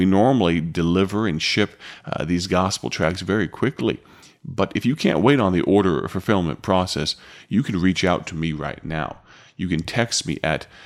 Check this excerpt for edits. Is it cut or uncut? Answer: uncut